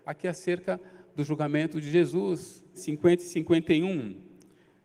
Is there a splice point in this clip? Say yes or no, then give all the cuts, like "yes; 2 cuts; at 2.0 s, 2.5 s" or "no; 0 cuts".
yes; 1 cut; at 2.7 s